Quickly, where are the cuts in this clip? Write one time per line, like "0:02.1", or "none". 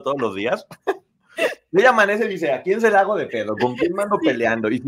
none

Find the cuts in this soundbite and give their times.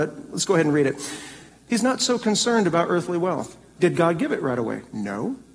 0:01.7
0:03.8

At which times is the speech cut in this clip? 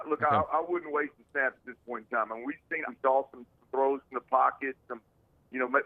0:02.9

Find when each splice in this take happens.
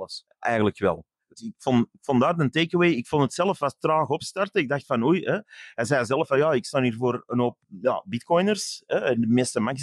none

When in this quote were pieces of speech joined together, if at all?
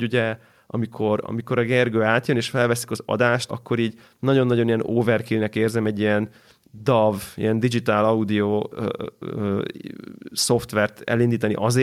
0:03.5

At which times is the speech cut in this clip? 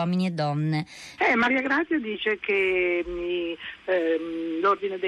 0:01.2

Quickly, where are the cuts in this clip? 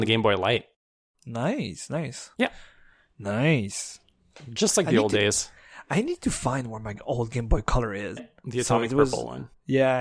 0:02.3
0:08.2

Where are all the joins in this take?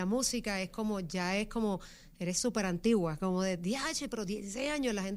none

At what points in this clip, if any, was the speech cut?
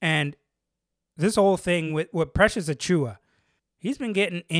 none

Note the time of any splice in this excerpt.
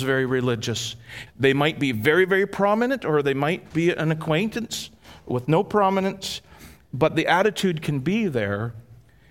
0:01.3
0:03.7

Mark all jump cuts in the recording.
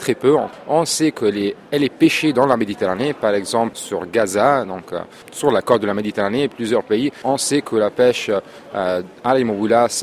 none

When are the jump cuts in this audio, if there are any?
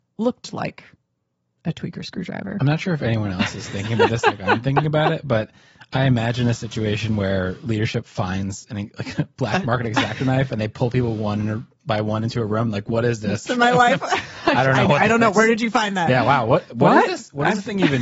0:13.5

